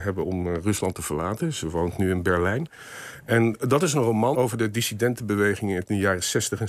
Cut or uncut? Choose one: cut